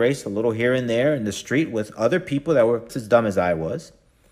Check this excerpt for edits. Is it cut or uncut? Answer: cut